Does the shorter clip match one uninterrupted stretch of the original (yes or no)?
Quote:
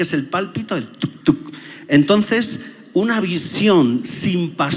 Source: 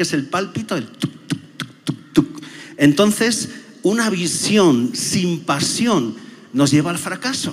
no